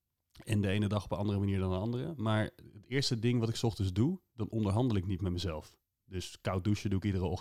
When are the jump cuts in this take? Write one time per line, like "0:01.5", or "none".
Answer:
none